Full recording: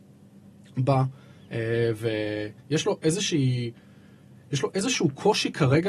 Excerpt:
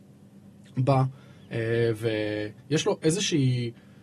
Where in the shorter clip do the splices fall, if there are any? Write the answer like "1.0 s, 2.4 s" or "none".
none